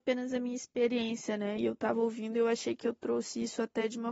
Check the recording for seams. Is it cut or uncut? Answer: uncut